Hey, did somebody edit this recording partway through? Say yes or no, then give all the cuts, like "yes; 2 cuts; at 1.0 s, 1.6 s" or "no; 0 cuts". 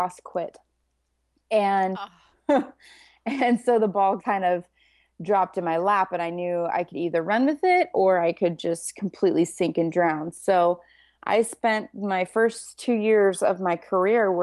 yes; 1 cut; at 4.2 s